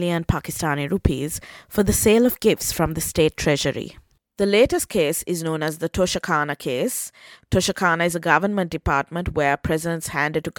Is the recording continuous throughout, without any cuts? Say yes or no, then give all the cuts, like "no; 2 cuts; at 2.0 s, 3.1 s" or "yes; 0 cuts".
no; 1 cut; at 4.2 s